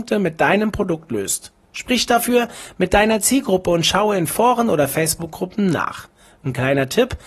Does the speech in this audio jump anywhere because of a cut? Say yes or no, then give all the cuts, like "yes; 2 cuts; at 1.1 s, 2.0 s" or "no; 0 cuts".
no; 0 cuts